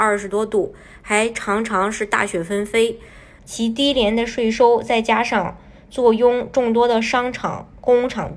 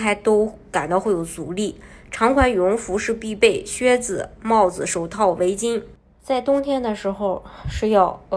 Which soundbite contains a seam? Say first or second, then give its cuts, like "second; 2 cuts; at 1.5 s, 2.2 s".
first; 1 cut; at 3.4 s